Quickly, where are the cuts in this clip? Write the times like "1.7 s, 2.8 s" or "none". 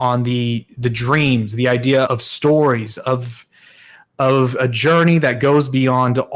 2.1 s